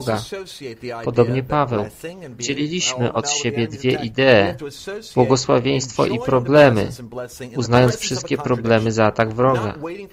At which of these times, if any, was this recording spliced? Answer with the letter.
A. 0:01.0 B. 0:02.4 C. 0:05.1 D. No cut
D